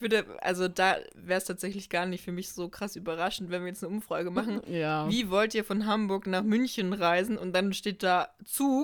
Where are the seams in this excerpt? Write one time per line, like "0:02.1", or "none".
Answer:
none